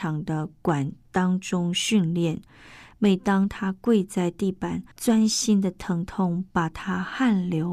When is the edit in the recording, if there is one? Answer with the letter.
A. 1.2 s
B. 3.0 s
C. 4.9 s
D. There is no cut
C